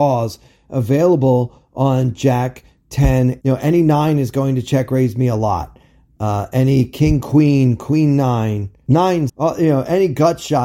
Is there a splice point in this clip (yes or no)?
yes